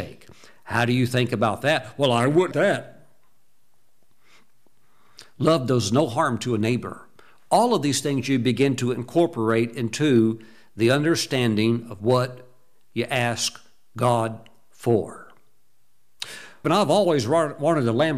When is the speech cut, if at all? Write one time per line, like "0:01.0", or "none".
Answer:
0:02.5
0:16.6